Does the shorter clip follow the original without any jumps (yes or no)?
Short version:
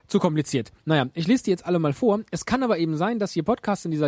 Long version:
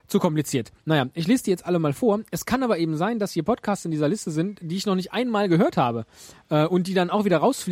yes